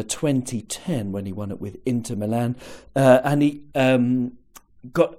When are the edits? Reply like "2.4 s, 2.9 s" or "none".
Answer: 3.7 s